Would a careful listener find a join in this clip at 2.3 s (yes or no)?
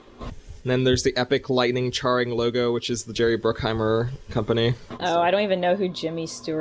no